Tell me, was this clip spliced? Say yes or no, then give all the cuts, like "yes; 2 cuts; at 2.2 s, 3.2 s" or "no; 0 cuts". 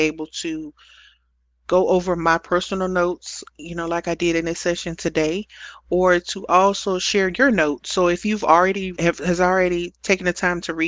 yes; 1 cut; at 9.0 s